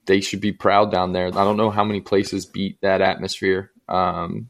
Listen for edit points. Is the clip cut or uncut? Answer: cut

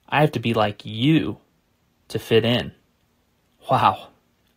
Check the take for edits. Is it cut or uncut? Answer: uncut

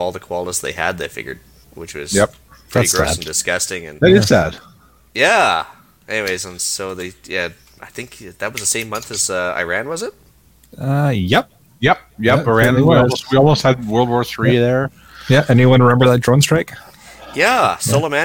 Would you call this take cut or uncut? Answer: uncut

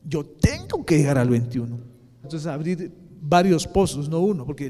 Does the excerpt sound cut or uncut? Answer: cut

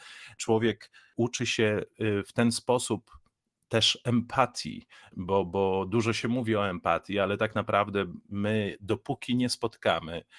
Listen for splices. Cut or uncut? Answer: uncut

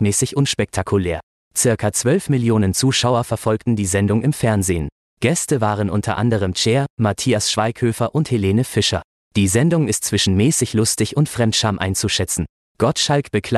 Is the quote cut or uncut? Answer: uncut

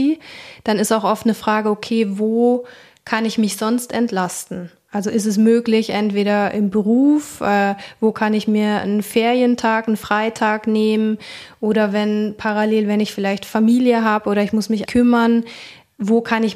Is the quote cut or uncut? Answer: cut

